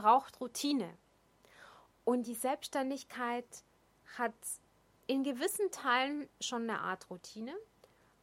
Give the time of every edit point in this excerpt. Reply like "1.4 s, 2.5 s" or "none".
none